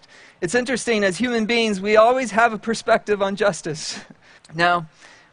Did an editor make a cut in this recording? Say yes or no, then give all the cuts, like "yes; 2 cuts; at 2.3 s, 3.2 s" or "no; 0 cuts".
yes; 1 cut; at 4.4 s